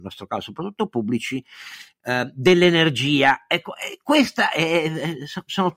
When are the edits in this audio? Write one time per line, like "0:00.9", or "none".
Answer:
none